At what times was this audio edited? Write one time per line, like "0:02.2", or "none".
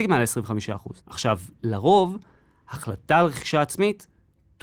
0:01.0